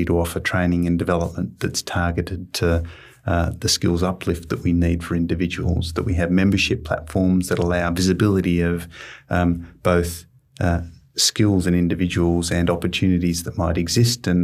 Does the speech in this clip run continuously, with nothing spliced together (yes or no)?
yes